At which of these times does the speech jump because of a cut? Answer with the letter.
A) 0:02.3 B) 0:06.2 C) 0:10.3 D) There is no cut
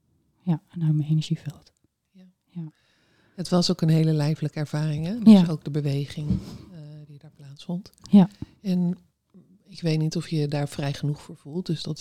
D